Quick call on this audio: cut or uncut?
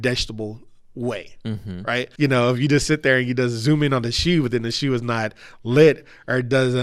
cut